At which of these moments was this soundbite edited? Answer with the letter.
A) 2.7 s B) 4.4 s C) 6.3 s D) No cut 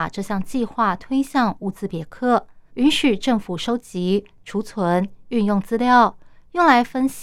A